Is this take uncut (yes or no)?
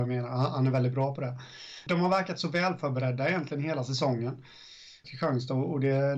no